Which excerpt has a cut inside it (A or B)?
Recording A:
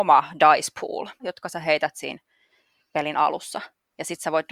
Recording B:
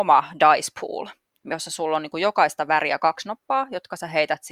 A